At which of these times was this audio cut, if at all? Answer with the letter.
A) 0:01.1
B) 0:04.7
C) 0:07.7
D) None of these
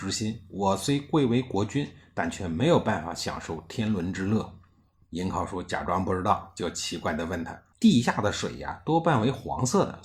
C